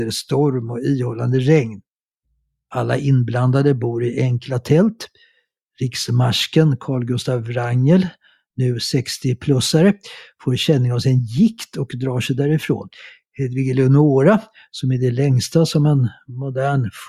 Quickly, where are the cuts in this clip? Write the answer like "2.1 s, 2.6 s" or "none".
none